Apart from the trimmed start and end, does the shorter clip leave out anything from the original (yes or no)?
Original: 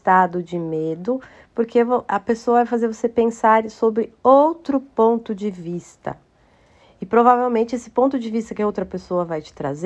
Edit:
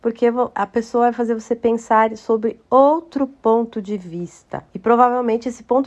yes